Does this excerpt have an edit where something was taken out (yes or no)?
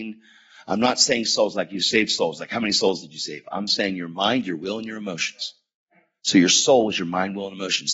no